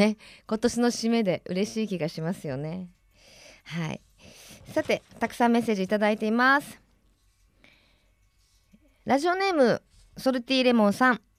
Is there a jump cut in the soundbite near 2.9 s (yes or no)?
no